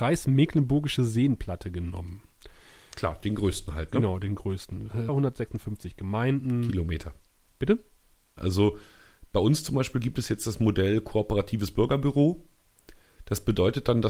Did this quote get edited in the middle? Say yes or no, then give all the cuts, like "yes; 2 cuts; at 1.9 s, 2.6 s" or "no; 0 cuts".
yes; 2 cuts; at 5.1 s, 8.4 s